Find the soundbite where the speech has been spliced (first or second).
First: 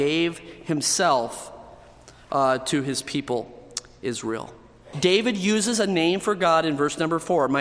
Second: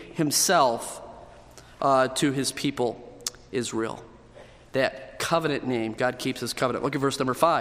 first